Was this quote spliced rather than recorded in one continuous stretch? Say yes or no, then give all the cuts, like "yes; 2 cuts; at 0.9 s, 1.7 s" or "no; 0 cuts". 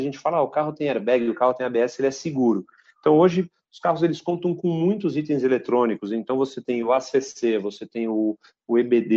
yes; 1 cut; at 2.9 s